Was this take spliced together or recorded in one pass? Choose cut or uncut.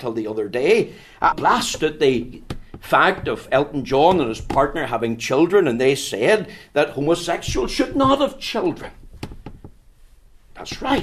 cut